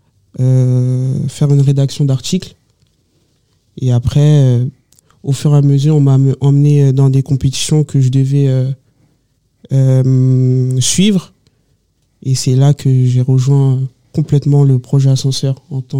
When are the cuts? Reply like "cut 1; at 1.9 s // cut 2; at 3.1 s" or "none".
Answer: none